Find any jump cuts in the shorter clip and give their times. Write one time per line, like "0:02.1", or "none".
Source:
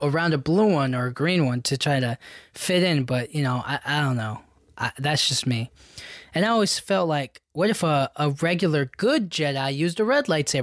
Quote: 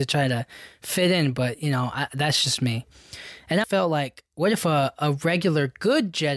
0:02.1
0:03.6